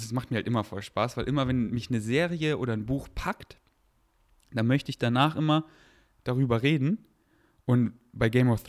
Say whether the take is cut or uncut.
uncut